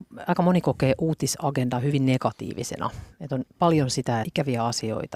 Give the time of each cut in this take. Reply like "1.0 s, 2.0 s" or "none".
4.2 s